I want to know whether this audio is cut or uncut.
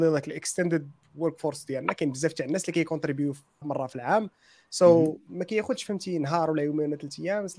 cut